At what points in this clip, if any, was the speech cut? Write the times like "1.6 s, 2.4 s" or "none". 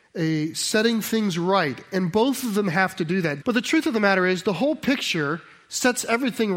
3.4 s